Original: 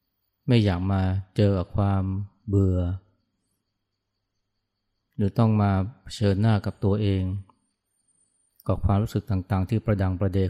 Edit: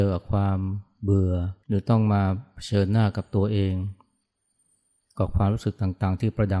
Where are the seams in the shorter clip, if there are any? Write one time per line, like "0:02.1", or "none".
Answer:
0:01.6